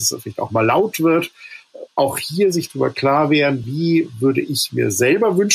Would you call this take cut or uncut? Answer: uncut